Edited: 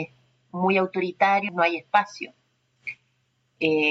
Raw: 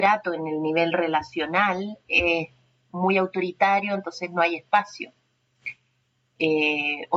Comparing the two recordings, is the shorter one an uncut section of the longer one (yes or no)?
no